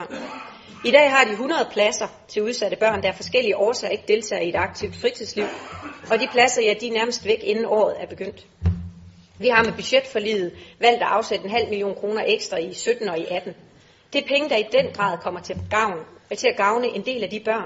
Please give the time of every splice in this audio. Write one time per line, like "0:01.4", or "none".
none